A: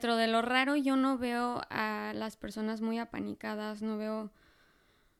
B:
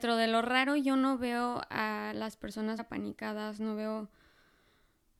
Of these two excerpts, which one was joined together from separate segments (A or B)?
B